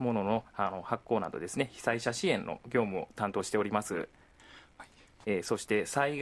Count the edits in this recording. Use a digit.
1